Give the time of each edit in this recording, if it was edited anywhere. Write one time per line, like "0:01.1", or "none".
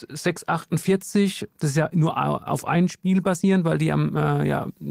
none